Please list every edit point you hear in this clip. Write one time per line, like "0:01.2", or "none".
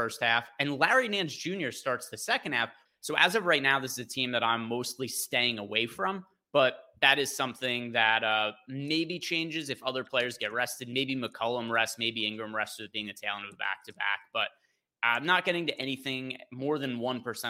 0:02.9